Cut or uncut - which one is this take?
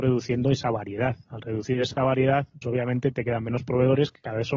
cut